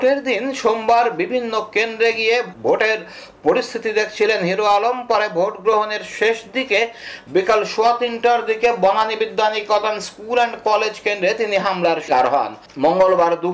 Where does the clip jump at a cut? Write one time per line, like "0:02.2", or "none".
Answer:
0:12.1

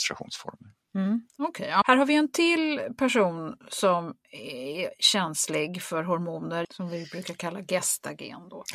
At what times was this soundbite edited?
0:01.8
0:06.6

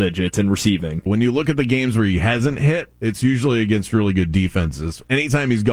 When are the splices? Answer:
0:01.1

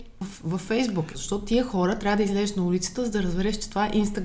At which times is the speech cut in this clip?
0:01.1

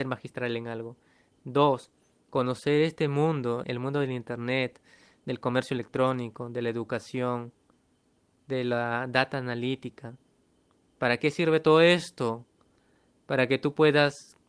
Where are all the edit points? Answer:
0:03.6

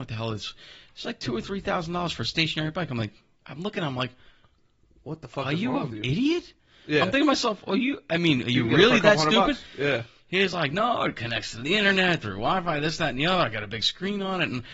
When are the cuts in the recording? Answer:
none

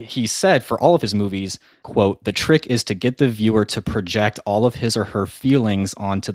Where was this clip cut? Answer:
none

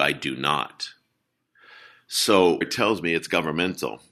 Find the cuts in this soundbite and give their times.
0:02.6

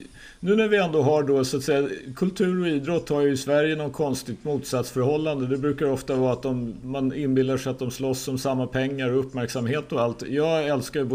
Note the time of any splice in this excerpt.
none

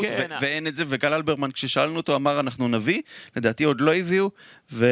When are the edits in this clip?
none

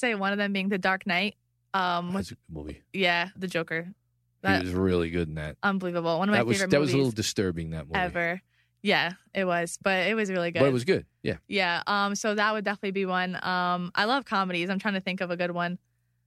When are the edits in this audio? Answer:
0:03.3

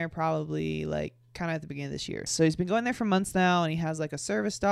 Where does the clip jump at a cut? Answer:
0:02.3

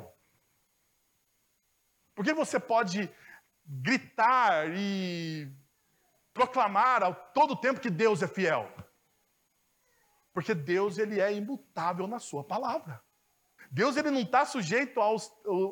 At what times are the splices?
0:13.6

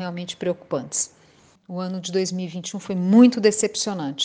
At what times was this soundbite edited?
0:01.5

